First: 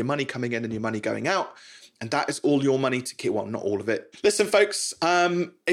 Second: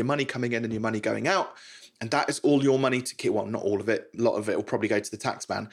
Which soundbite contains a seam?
first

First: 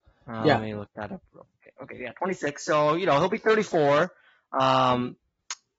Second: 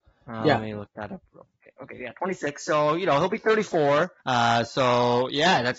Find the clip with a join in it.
second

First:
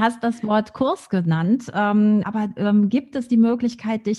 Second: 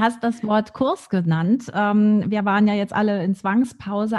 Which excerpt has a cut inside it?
first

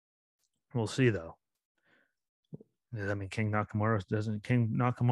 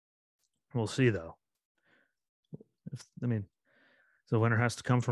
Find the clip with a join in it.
second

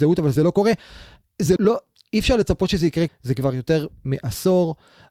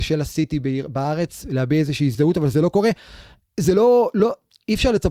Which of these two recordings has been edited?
first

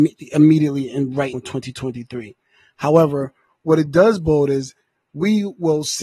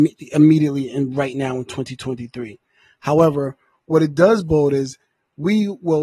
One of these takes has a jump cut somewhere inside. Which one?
first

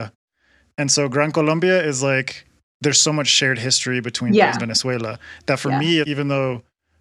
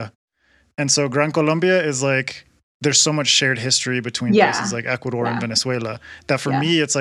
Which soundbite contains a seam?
first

